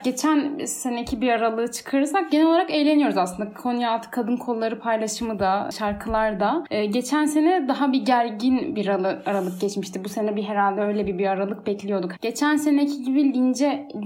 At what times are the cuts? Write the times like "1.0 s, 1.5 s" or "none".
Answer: 8.7 s, 12.1 s